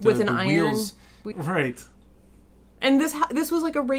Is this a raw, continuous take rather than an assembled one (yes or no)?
no